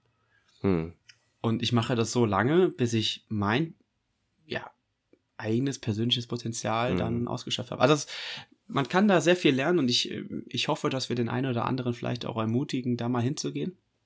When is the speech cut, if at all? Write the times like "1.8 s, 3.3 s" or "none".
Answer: none